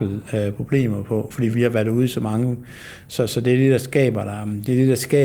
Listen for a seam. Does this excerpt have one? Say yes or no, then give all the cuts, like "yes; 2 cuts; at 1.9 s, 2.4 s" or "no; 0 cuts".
no; 0 cuts